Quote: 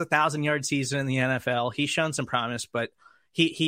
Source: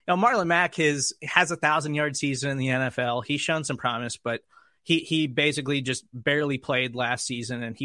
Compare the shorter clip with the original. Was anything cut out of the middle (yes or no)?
no